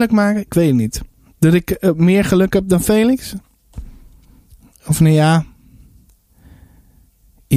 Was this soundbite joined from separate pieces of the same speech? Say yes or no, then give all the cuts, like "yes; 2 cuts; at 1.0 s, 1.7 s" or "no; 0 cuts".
no; 0 cuts